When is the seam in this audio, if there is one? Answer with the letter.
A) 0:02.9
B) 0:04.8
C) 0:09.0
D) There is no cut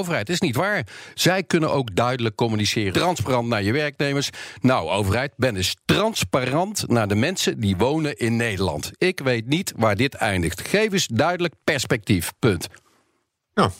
A